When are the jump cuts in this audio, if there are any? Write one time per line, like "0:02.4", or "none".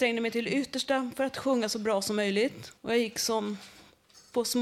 0:02.8